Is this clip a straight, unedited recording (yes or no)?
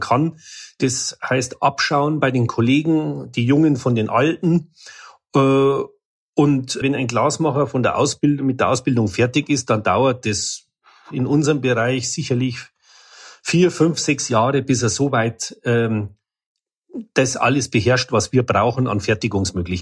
no